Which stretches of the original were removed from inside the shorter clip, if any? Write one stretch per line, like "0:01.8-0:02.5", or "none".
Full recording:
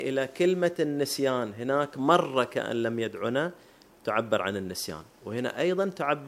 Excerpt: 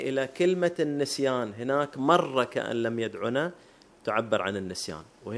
none